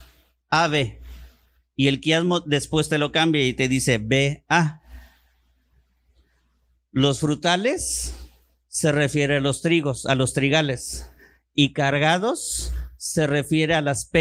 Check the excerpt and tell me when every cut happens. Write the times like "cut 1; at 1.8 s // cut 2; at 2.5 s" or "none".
none